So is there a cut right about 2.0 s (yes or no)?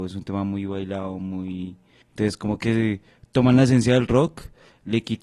yes